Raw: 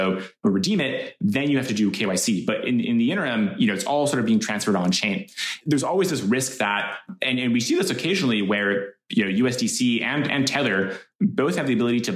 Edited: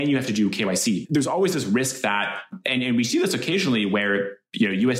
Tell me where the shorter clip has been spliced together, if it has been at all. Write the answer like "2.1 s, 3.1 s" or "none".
1.0 s